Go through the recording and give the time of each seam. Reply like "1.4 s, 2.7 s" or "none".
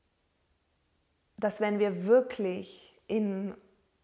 none